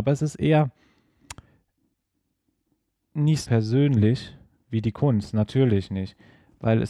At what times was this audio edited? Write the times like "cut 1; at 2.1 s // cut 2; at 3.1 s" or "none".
cut 1; at 3.4 s